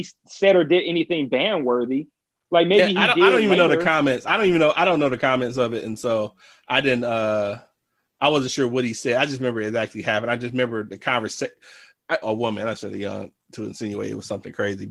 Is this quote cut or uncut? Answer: cut